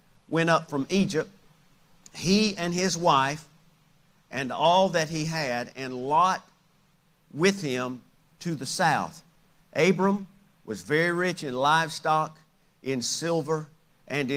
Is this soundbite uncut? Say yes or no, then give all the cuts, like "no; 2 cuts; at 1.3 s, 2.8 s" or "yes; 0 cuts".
yes; 0 cuts